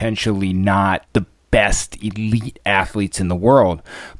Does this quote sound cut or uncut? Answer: uncut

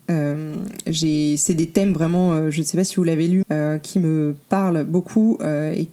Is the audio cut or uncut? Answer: cut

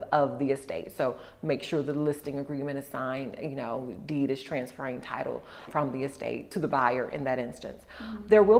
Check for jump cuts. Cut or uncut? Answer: cut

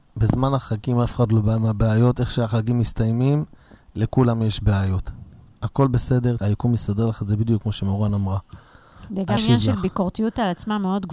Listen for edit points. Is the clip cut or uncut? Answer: cut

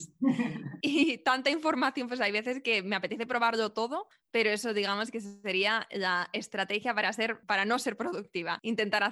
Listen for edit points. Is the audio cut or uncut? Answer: uncut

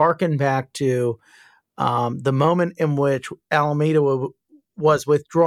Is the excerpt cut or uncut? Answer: uncut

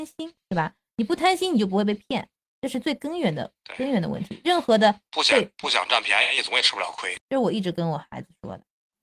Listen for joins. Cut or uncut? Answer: cut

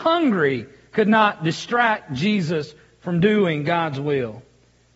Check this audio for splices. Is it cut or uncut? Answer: uncut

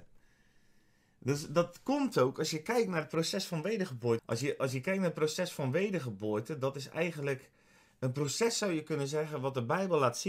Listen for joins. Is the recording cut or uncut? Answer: cut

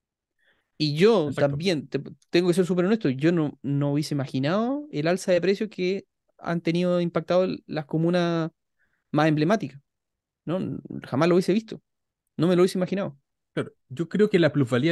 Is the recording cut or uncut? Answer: uncut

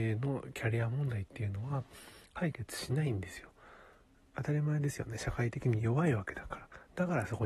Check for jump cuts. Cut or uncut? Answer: uncut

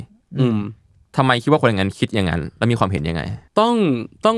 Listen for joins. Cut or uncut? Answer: cut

